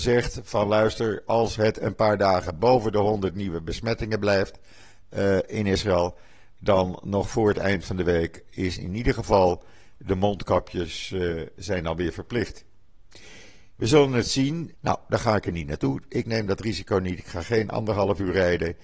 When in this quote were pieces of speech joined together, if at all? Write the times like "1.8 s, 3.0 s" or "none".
14.7 s